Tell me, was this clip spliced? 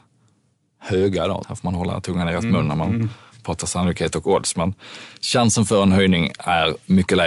yes; 1 cut; at 1.4 s

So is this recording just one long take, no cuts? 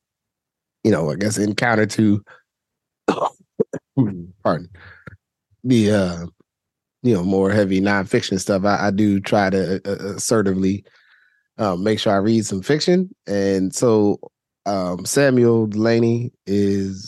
yes; 0 cuts

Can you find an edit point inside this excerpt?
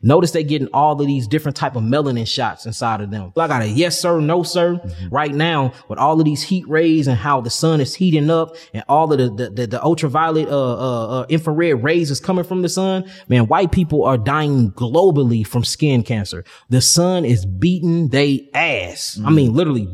yes; 2 cuts; at 3.4 s, 5.1 s

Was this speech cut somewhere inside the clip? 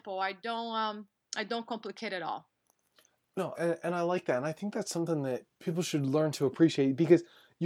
yes; 2 cuts; at 3.5 s, 5.5 s

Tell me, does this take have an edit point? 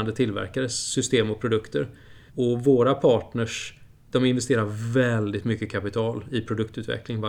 yes; 1 cut; at 2.3 s

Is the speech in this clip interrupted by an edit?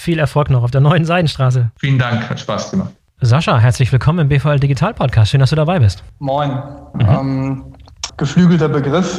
yes; 3 cuts; at 3.2 s, 6.9 s, 8.1 s

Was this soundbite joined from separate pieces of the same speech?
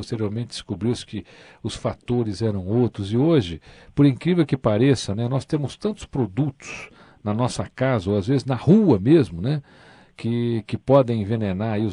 no; 0 cuts

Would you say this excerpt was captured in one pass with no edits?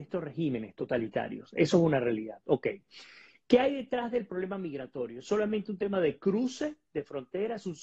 yes; 0 cuts

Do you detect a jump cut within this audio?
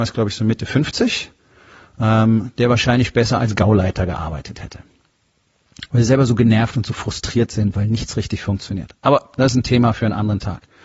yes; 1 cut; at 5.9 s

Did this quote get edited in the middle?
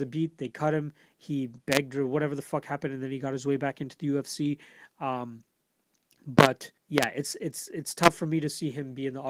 yes; 1 cut; at 6.8 s

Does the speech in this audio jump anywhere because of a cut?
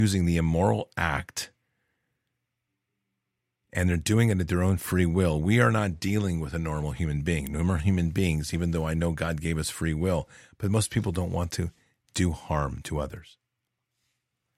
no; 0 cuts

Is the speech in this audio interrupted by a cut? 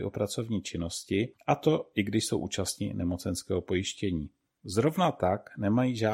no; 0 cuts

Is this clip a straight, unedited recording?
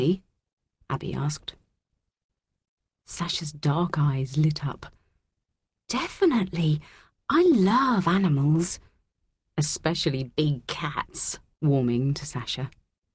no; 2 cuts; at 9.5 s, 11.5 s

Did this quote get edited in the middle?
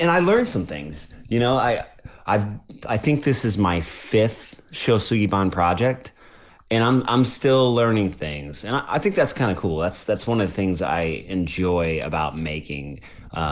no; 0 cuts

